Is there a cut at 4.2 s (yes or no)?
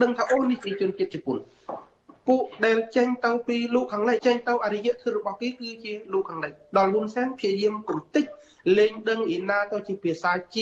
yes